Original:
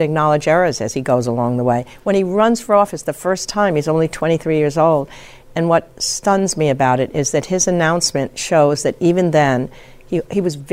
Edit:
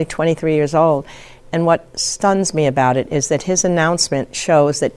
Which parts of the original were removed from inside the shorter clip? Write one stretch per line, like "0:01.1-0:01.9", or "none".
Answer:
none

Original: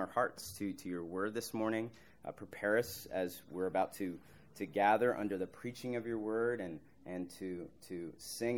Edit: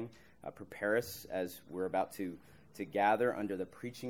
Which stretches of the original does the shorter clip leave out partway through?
none

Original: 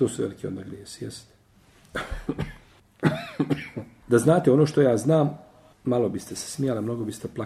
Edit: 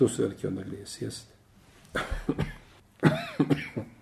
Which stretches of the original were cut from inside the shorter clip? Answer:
none

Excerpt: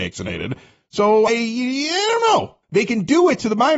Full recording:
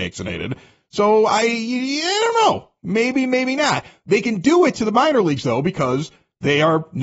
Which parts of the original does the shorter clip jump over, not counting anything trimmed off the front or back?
0:01.3-0:01.4
0:02.8-0:04.0

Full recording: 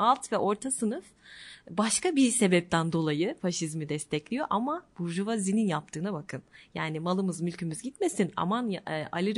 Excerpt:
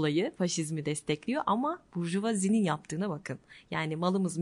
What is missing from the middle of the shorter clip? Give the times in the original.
none

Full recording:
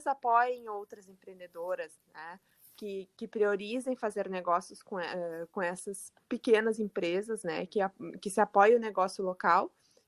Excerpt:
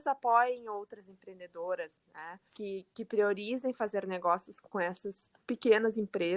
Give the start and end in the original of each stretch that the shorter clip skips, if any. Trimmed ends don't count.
0:02.5-0:02.7
0:04.9-0:05.5

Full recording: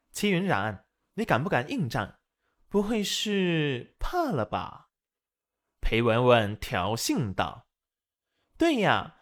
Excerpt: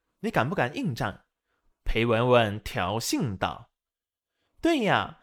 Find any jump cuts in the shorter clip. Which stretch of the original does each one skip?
0:02.6-0:05.7

